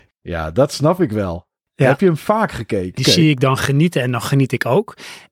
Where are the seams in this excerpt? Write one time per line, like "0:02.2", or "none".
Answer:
0:03.0

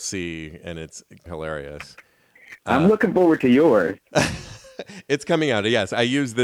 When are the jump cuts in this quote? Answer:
0:01.3

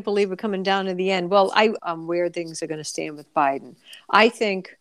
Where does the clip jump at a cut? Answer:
0:01.8

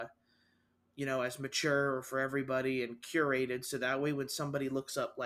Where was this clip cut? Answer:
none

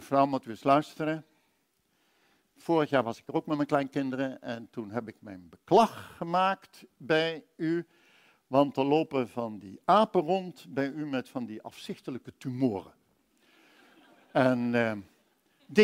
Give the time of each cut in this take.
none

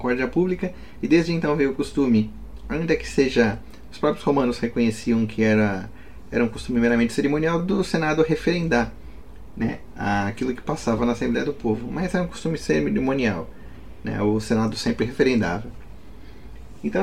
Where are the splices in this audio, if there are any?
none

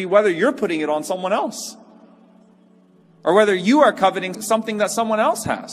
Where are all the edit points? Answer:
0:04.3

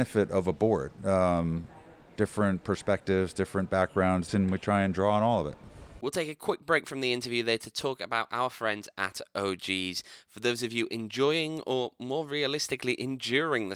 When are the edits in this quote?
0:02.2
0:04.3

